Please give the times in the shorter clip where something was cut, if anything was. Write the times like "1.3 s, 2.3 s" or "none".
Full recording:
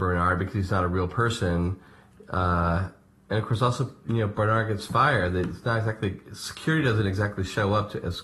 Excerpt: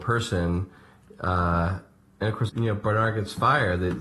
2.5 s